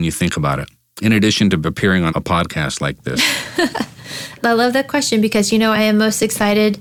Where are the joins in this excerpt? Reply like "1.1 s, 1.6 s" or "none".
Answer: 2.1 s, 5.7 s